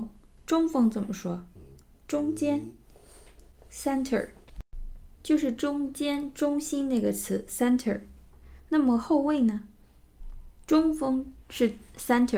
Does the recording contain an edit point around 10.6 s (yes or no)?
no